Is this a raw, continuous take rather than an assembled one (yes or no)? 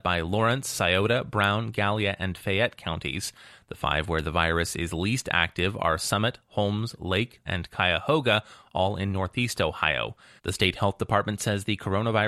no